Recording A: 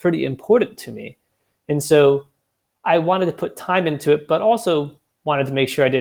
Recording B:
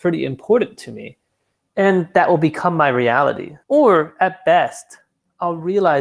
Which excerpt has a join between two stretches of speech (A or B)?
B